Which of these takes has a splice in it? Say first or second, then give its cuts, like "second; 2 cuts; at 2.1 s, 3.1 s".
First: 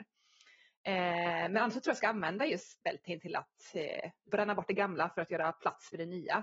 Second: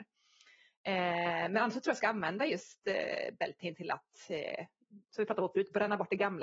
first; 2 cuts; at 2.8 s, 4.3 s